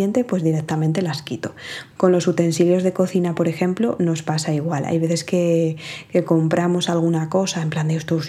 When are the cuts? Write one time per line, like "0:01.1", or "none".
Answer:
0:01.9